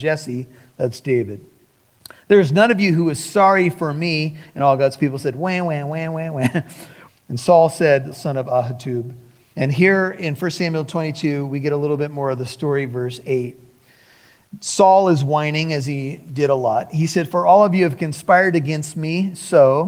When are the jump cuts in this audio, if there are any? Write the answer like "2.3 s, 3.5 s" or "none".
7.1 s, 8.1 s, 9.5 s